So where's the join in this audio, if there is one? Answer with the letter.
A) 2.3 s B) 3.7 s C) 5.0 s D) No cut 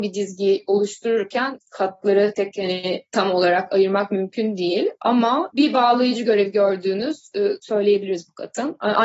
A